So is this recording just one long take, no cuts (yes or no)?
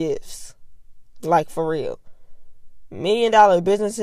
yes